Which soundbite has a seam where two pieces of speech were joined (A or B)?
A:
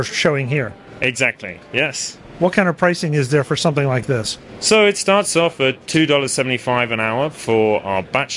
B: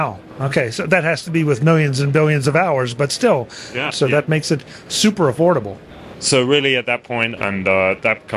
B